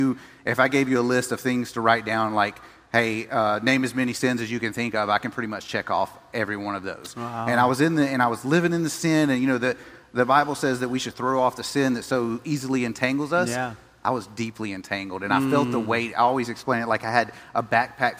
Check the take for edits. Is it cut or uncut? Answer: uncut